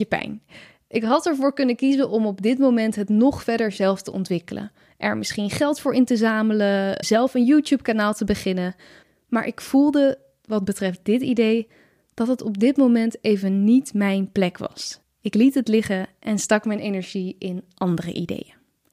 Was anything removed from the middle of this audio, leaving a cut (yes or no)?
yes